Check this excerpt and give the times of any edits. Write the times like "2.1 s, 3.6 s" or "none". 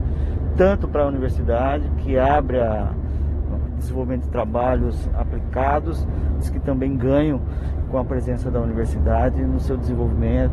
3.7 s, 6.4 s